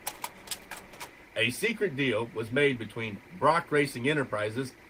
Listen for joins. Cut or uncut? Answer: uncut